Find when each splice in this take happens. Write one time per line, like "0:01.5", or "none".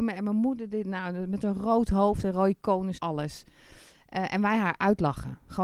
0:03.0